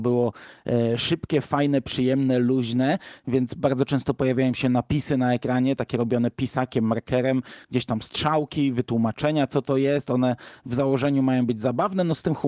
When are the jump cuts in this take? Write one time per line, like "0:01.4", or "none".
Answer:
none